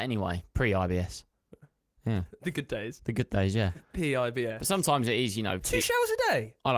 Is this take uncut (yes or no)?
yes